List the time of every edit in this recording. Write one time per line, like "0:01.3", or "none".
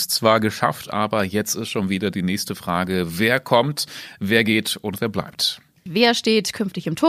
0:05.9

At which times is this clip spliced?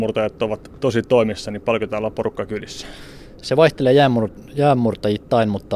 none

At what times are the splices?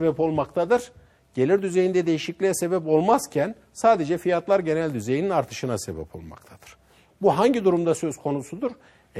none

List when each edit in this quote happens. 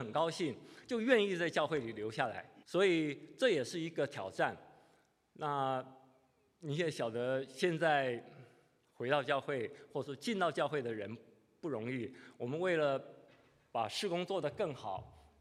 0:02.6

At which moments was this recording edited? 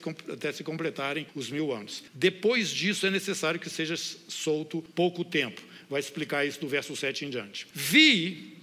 none

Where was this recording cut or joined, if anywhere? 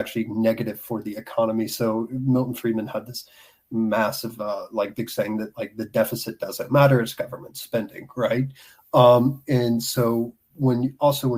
none

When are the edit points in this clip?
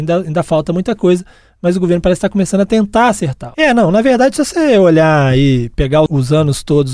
0:03.5

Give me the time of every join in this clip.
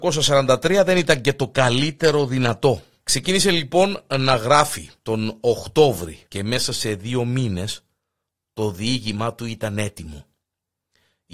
0:03.0
0:05.0
0:06.3

